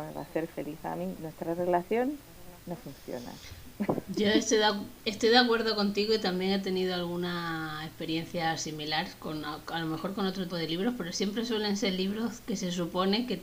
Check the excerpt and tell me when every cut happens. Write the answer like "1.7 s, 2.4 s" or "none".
10.5 s